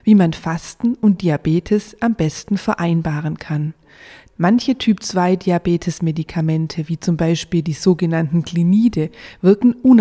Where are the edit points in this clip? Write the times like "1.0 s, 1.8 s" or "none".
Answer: none